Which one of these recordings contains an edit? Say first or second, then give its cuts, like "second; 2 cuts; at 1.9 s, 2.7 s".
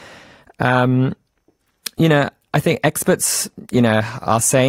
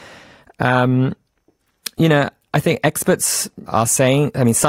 second; 1 cut; at 3.7 s